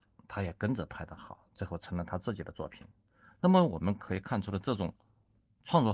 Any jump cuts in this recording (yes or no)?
no